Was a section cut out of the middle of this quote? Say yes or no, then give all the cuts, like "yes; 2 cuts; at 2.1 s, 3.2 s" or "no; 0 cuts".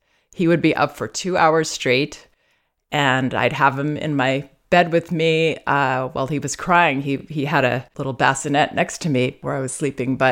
no; 0 cuts